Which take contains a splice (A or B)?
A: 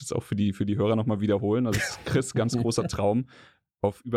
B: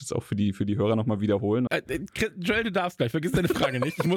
B